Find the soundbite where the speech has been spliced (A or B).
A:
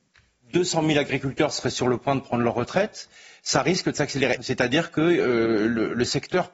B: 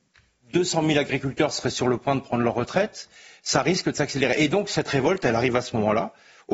A